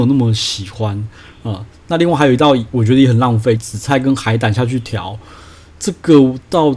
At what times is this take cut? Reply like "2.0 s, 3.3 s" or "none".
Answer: 3.6 s